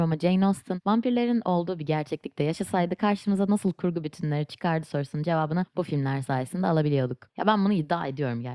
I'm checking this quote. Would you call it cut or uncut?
cut